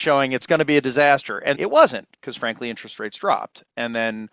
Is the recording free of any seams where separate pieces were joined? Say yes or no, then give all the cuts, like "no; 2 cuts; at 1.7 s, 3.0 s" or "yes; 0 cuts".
no; 1 cut; at 1.5 s